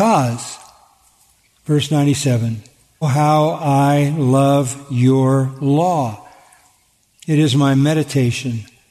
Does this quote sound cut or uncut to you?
cut